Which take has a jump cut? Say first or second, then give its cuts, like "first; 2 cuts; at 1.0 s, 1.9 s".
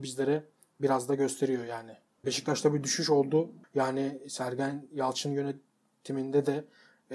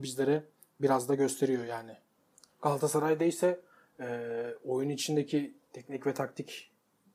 first; 2 cuts; at 2.2 s, 3.6 s